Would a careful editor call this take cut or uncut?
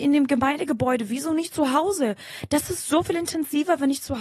uncut